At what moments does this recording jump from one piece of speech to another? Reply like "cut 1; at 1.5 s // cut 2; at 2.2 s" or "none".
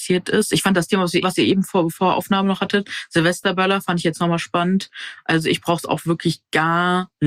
cut 1; at 1.2 s